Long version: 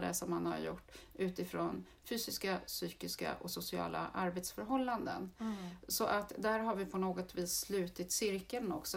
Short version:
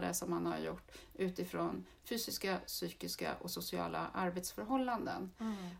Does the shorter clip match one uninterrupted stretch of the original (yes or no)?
yes